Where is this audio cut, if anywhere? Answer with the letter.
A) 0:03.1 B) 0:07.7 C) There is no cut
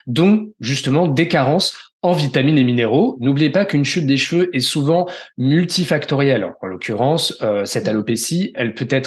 A